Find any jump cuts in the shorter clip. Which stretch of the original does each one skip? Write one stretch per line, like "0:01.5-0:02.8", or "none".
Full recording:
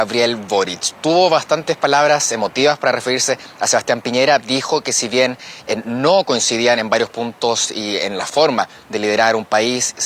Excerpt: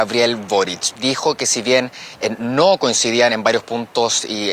0:00.9-0:04.4